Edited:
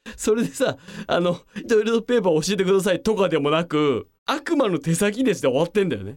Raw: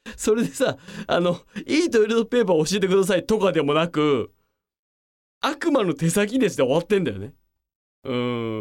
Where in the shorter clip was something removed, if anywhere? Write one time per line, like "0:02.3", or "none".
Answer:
0:01.6
0:04.2

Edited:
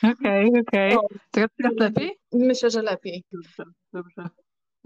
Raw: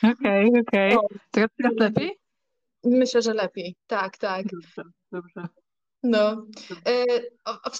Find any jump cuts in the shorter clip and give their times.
0:02.2
0:03.3

